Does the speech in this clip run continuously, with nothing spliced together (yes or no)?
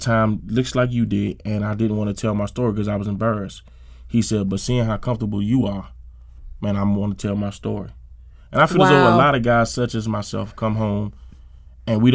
yes